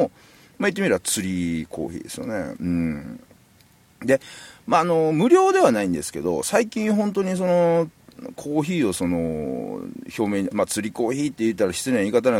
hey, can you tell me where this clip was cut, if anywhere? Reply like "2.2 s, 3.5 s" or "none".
10.5 s